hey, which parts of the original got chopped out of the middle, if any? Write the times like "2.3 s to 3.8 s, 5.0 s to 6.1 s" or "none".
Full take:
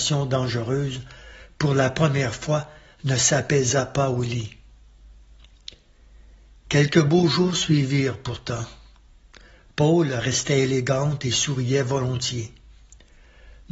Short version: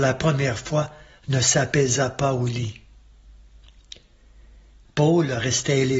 6.6 s to 9.7 s